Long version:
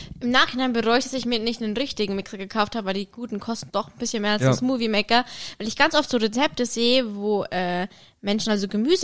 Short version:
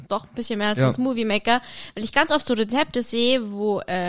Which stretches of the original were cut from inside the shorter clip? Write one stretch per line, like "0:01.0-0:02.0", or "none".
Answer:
none